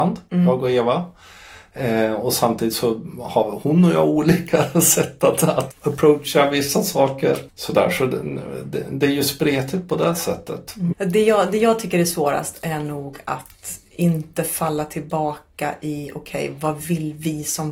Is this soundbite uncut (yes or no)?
no